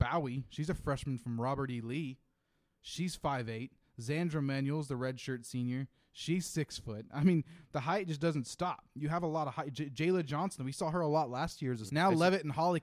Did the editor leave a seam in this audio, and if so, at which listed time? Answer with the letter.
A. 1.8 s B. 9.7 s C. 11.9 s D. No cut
C